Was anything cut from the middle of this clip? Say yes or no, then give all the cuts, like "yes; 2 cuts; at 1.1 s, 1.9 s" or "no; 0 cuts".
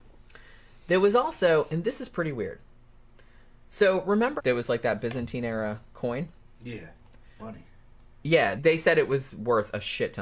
yes; 3 cuts; at 4.4 s, 7.4 s, 8.6 s